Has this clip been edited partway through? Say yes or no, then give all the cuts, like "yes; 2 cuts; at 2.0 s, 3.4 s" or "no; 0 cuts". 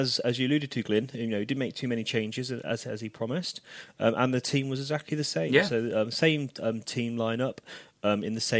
no; 0 cuts